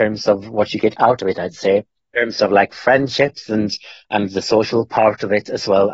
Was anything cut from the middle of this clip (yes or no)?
no